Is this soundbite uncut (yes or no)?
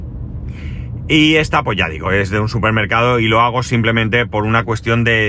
yes